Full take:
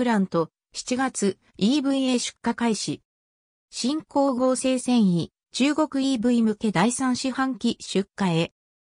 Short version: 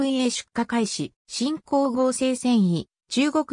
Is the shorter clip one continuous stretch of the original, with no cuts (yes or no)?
no